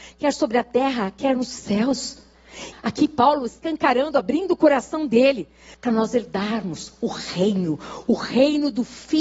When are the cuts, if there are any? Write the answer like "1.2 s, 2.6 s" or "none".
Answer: 2.7 s, 5.7 s